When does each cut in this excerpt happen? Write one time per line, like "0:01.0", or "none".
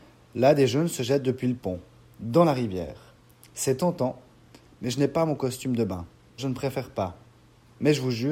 0:06.4